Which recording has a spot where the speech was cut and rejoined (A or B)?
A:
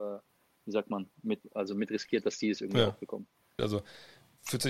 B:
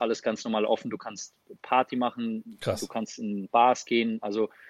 A